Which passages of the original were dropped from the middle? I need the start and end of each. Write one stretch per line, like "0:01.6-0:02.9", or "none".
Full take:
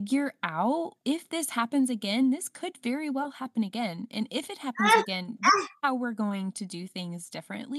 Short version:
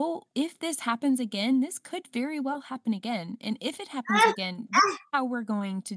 none